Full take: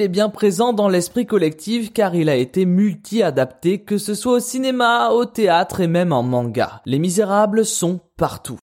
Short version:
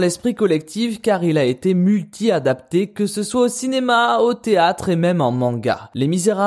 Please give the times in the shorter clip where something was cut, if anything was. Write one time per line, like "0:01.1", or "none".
none